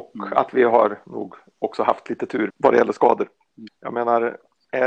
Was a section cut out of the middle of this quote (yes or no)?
yes